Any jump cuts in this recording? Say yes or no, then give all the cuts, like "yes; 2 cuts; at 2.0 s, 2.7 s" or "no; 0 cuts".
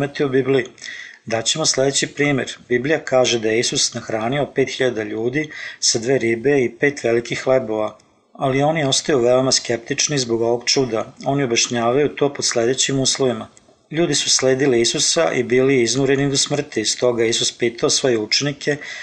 no; 0 cuts